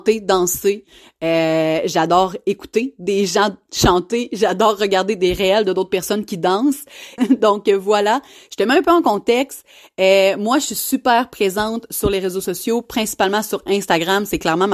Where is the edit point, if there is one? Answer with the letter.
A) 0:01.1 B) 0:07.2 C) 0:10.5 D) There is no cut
B